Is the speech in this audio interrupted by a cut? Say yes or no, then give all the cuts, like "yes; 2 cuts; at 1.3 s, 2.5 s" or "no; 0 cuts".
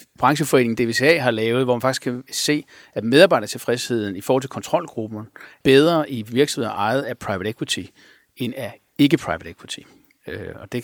yes; 1 cut; at 5.6 s